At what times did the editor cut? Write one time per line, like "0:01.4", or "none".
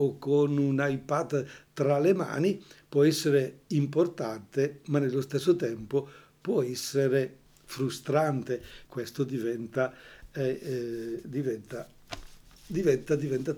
0:08.8